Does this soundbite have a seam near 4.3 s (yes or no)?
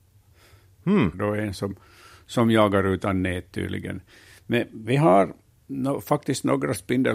no